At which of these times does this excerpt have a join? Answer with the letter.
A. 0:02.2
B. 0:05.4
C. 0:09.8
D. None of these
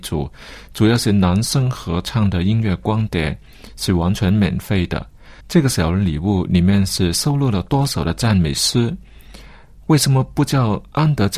B